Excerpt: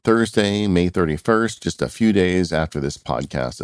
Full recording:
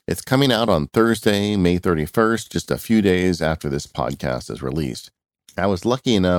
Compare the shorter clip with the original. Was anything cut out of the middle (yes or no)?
no